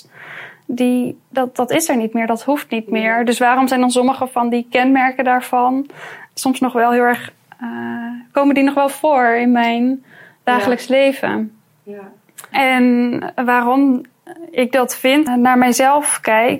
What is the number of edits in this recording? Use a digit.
2